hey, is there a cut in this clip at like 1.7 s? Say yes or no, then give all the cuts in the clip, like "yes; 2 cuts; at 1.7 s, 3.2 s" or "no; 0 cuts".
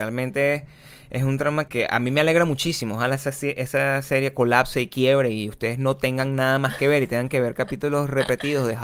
yes; 1 cut; at 1.7 s